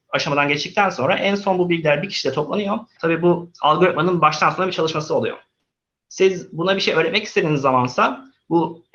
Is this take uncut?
no; 1 cut; at 3.0 s

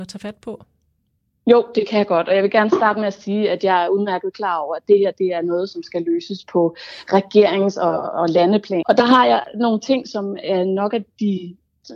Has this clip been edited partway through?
yes; 1 cut; at 8.8 s

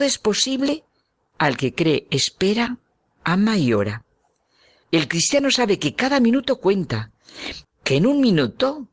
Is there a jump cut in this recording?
yes; 2 cuts; at 4.8 s, 7.6 s

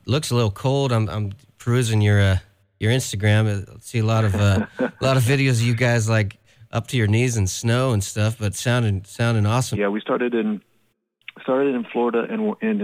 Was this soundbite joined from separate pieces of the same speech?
yes; 1 cut; at 9.7 s

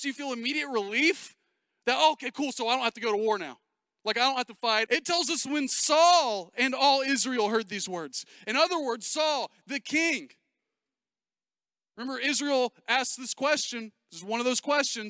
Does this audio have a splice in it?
yes; 1 cut; at 4.9 s

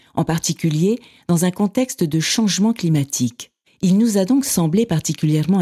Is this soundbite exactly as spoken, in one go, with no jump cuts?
no; 1 cut; at 3.7 s

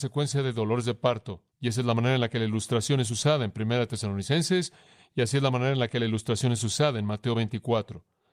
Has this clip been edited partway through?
yes; 1 cut; at 1.5 s

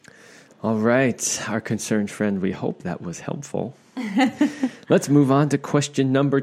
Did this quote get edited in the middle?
no; 0 cuts

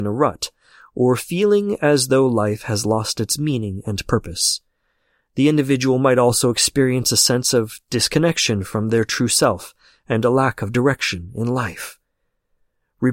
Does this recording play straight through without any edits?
yes; 0 cuts

